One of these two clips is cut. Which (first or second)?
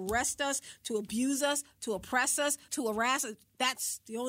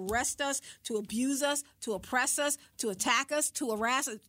first